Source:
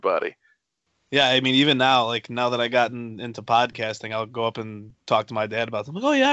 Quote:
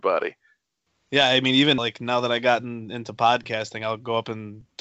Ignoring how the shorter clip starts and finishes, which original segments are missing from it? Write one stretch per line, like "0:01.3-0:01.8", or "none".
0:01.8-0:02.1